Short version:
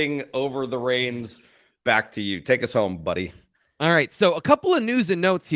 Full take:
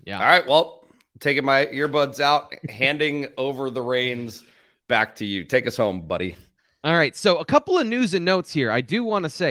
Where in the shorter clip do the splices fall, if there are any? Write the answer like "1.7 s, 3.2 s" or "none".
none